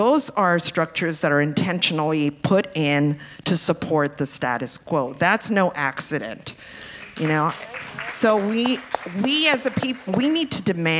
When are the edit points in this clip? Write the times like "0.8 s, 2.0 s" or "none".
none